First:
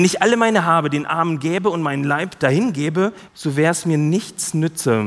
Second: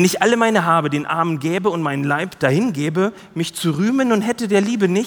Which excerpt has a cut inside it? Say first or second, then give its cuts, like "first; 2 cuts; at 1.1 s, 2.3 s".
first; 1 cut; at 3.3 s